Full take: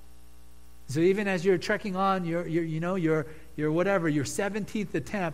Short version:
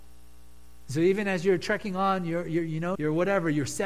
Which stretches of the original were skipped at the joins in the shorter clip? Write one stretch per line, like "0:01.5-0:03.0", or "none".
0:02.9-0:03.5